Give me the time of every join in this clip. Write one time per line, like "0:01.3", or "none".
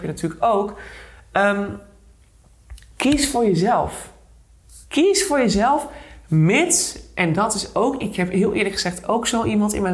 none